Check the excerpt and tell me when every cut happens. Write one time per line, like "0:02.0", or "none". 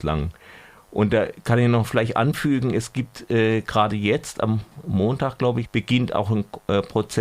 0:05.6